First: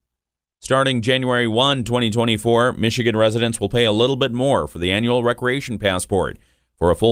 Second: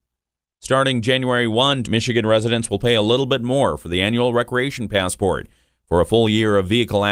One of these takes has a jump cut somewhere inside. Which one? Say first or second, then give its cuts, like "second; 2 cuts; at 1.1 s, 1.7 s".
second; 1 cut; at 1.8 s